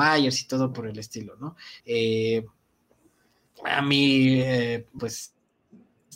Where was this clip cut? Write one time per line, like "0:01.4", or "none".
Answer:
0:01.8
0:05.0